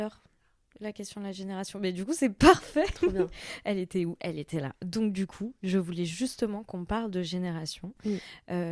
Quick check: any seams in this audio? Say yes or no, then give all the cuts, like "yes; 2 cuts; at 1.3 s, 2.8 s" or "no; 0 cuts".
no; 0 cuts